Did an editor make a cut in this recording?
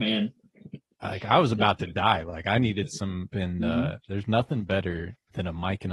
yes; 1 cut; at 3.3 s

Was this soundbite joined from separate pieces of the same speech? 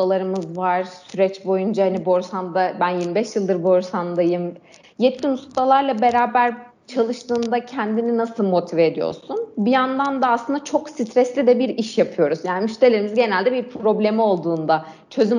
yes; 1 cut; at 4.8 s

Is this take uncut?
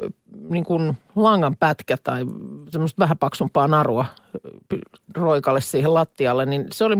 yes; 0 cuts

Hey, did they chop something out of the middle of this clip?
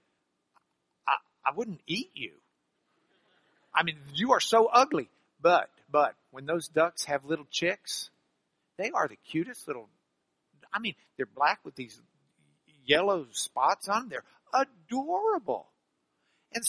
yes; 1 cut; at 5.8 s

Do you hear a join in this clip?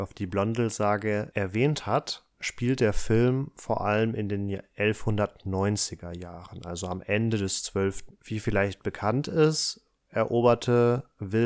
yes; 1 cut; at 8.1 s

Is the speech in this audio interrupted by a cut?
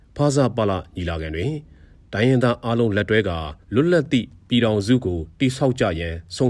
yes; 1 cut; at 3.6 s

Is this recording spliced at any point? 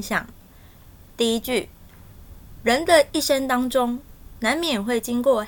no; 0 cuts

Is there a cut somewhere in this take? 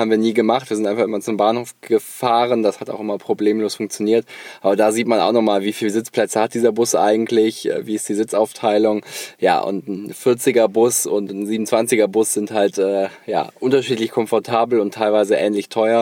no; 0 cuts

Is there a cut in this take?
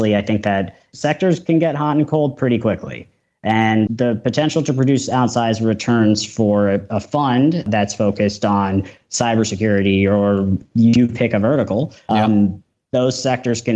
yes; 1 cut; at 3.9 s

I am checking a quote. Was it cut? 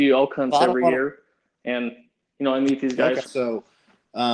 yes; 1 cut; at 3.2 s

